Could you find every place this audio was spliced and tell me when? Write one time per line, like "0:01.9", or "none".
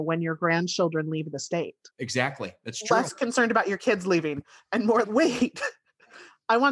0:01.9
0:05.0